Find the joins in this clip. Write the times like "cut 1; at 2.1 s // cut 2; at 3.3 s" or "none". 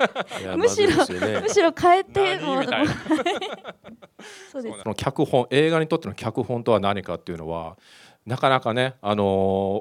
cut 1; at 4.8 s